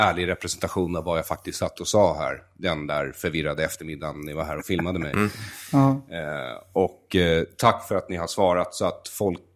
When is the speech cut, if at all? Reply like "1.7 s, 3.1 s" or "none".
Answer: none

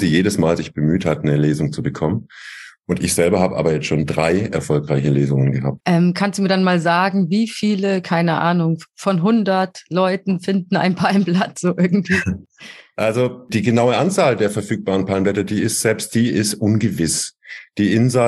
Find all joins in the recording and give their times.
5.8 s

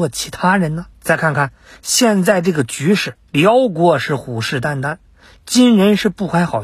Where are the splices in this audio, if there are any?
0.9 s, 3.3 s

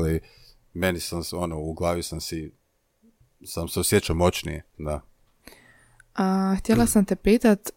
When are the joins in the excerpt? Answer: none

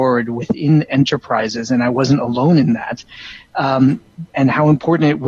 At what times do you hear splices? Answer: none

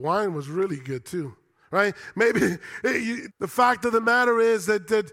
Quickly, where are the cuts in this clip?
3.3 s

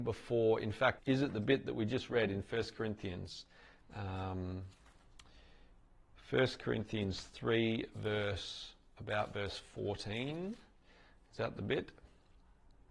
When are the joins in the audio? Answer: 1.0 s, 3.8 s

